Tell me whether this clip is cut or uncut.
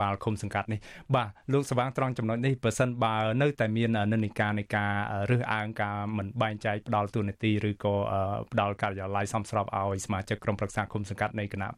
uncut